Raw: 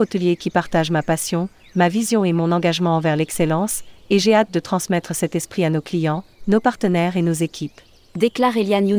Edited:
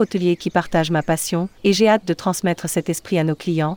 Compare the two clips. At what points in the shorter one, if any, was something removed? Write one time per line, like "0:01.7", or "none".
0:01.6